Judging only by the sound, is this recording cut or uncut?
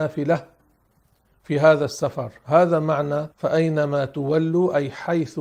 cut